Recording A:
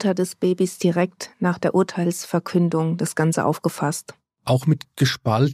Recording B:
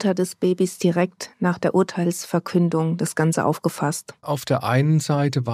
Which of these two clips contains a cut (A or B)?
B